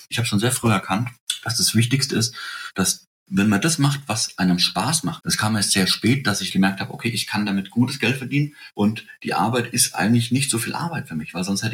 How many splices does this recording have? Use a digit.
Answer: 2